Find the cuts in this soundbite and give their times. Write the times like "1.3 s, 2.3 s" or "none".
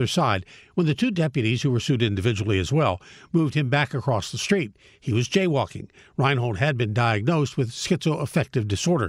none

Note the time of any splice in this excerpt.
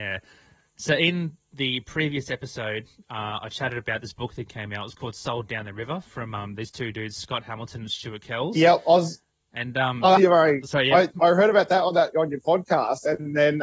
10.2 s

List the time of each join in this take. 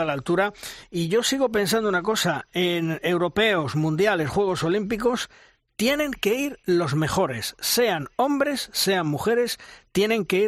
none

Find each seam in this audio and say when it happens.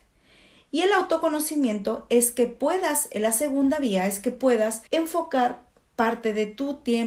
4.9 s

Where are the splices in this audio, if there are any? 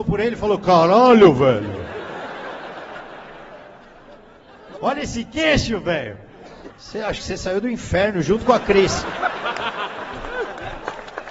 4.8 s, 6.7 s

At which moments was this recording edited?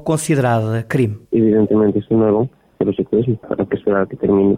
1.3 s

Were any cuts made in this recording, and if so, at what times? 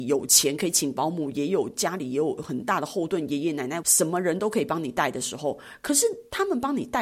3.8 s

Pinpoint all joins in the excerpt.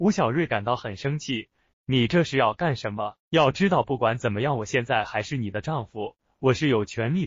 1.7 s, 3.2 s

